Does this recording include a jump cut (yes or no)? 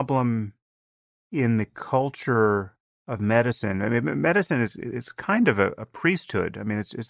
no